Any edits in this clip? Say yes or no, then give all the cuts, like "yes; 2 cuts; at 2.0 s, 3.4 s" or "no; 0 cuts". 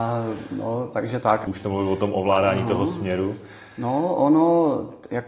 yes; 1 cut; at 1.5 s